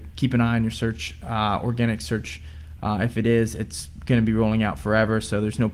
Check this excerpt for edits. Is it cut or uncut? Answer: cut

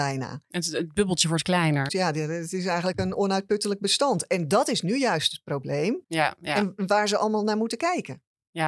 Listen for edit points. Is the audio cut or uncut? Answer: cut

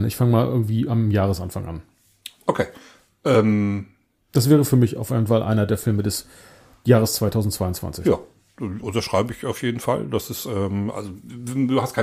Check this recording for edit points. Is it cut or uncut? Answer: uncut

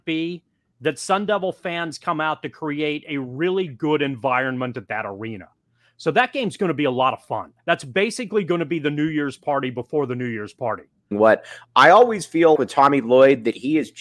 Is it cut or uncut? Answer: cut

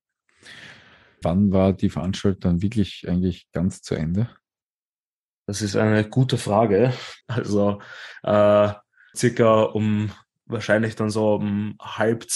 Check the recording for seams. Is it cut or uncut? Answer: cut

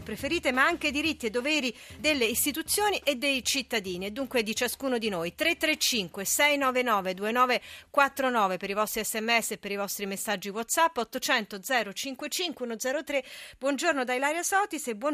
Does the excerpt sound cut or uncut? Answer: cut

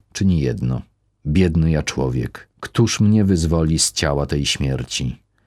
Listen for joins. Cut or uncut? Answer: cut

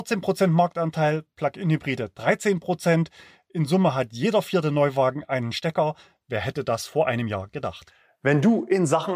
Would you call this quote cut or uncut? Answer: uncut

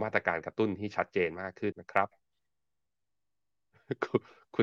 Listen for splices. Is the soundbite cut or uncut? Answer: cut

